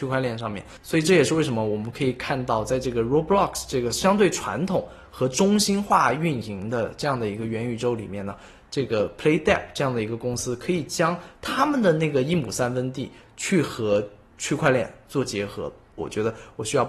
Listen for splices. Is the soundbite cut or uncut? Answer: cut